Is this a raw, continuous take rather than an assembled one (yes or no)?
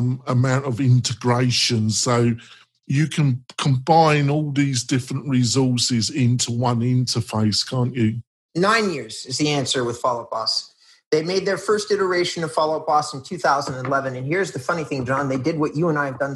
no